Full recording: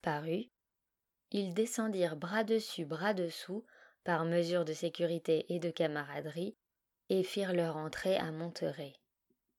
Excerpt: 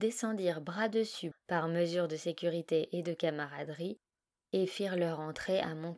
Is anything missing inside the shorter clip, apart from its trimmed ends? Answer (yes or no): yes